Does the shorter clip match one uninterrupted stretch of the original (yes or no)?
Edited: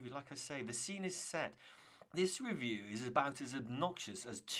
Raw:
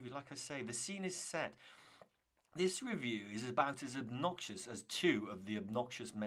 no